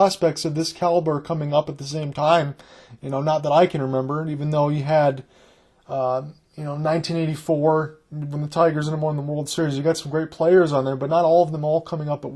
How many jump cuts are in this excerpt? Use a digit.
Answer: 0